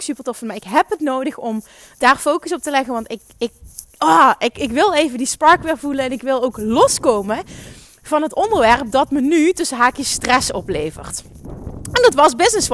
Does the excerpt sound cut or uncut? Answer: uncut